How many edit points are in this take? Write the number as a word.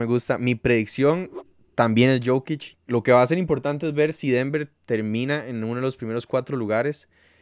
one